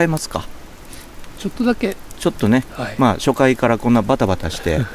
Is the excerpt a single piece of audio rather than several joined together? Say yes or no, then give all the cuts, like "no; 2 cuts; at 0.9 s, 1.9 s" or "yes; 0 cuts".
no; 1 cut; at 2.7 s